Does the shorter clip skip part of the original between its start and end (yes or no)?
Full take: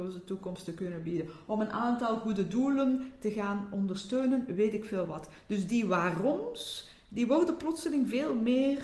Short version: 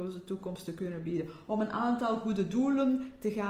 no